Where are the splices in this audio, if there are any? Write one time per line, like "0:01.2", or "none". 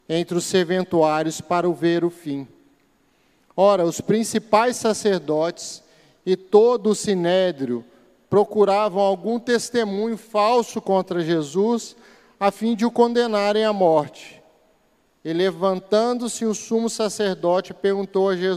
0:15.2